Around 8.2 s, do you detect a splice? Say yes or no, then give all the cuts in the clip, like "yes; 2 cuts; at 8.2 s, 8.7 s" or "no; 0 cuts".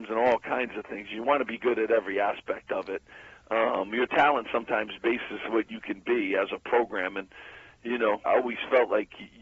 yes; 1 cut; at 8.2 s